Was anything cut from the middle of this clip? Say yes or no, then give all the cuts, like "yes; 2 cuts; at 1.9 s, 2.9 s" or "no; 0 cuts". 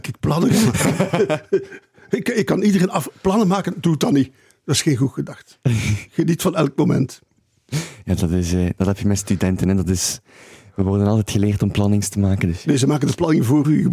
no; 0 cuts